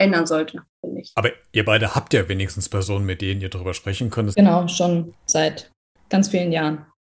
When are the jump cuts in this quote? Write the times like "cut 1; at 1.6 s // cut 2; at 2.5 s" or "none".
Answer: cut 1; at 4.3 s